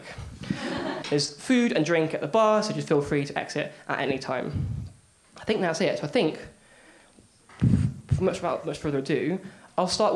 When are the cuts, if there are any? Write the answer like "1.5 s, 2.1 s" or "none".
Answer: 1.0 s